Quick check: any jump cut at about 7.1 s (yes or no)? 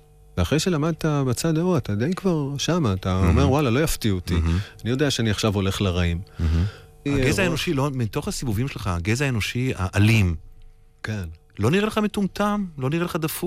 yes